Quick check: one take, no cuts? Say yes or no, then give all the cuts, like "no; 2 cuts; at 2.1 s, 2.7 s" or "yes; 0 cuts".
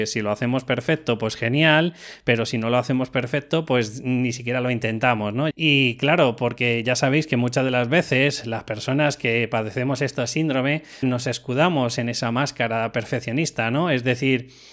no; 2 cuts; at 5.5 s, 11.0 s